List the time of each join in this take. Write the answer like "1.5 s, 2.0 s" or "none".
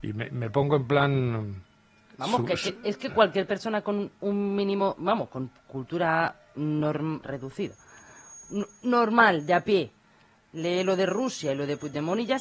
7.2 s